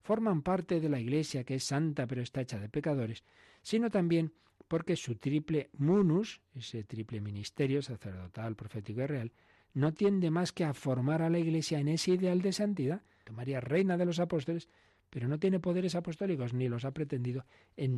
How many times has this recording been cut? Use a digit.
1